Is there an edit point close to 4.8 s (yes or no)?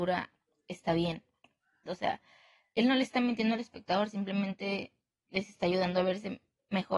no